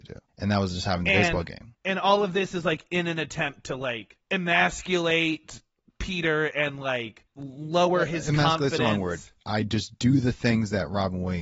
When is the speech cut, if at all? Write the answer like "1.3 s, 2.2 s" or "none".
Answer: 9.4 s